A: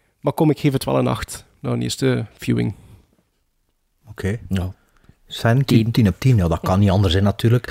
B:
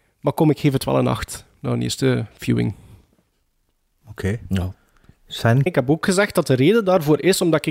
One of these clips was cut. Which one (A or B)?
B